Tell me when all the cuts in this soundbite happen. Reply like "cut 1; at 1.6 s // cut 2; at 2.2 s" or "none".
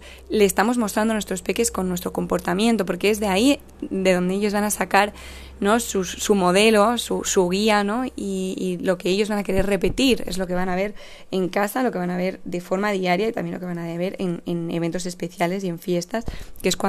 none